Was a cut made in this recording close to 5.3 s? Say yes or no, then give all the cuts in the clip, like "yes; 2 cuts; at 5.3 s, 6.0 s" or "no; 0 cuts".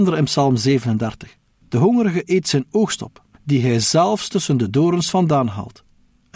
no; 1 cut; at 1.6 s